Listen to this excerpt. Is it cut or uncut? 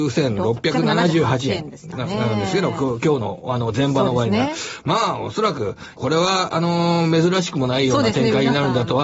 cut